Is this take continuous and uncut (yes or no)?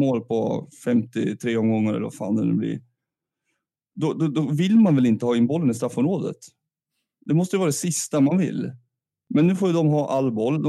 yes